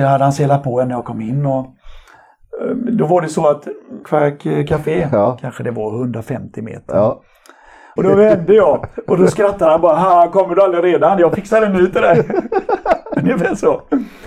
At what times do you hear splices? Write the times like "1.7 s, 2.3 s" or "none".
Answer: 4.0 s, 8.0 s